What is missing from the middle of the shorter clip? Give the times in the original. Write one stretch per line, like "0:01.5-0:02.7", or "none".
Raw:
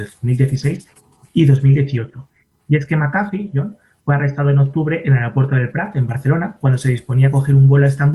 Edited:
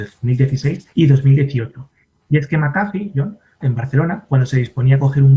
0:00.9-0:01.3
0:04.0-0:05.9